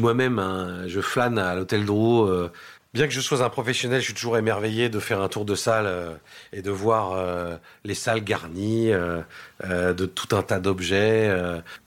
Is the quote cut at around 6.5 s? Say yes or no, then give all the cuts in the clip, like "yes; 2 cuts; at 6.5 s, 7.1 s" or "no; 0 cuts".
no; 0 cuts